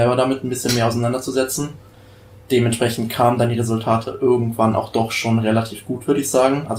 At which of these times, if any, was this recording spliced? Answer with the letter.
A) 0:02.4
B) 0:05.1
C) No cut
C